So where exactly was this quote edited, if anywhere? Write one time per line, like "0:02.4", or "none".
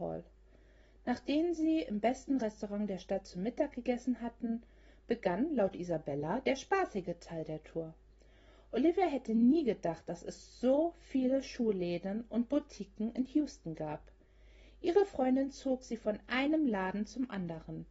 none